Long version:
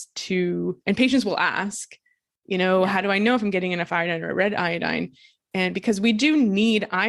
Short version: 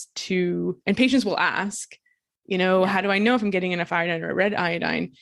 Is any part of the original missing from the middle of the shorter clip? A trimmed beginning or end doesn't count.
no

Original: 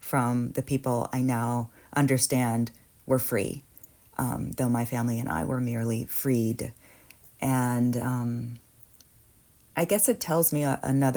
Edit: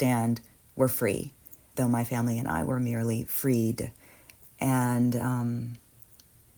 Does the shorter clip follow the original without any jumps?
no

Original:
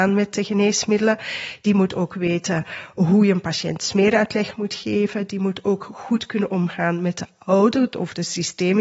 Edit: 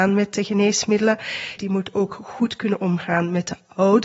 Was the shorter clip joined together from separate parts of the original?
yes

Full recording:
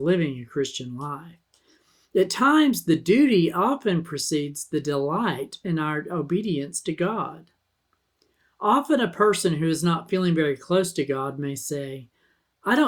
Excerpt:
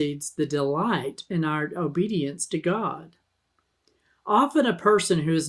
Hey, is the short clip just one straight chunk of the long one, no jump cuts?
yes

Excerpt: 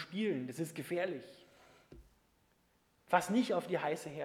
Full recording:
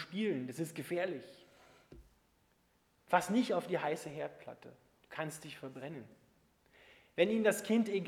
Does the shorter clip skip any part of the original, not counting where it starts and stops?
no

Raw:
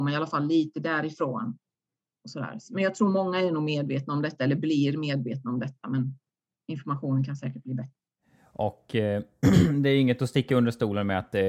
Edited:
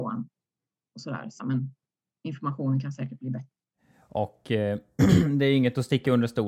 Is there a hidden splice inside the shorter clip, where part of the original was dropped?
yes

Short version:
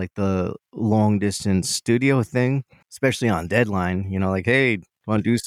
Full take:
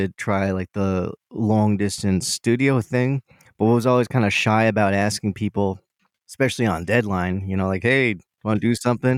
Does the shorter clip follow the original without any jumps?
no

